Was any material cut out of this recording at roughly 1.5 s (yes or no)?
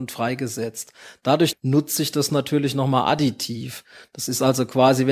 yes